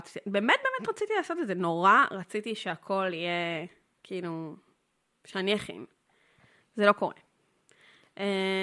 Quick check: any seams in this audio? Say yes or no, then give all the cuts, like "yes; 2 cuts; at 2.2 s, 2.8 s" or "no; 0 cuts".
no; 0 cuts